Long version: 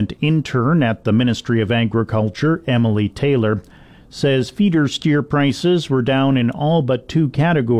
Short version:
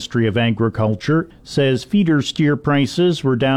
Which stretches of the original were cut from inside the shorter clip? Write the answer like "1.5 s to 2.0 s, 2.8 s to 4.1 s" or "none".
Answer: 2.6 s to 4.0 s